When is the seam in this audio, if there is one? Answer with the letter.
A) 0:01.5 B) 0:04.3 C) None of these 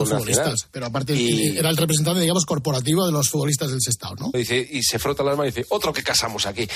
B